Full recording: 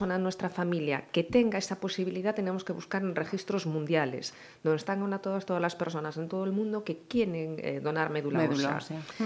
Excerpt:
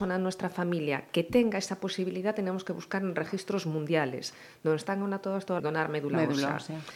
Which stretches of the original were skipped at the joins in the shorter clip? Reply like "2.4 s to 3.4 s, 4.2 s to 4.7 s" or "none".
5.6 s to 7.8 s